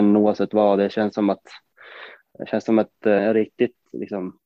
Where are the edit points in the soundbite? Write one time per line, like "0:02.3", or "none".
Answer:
0:03.2

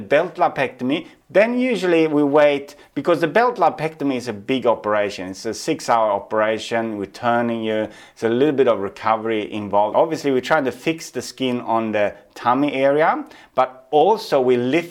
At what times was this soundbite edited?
0:01.2
0:09.9

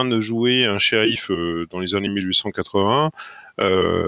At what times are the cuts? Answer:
none

